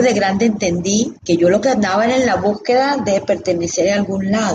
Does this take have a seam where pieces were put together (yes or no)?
yes